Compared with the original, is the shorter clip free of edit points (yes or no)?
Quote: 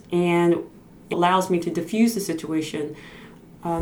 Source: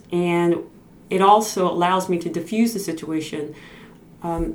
no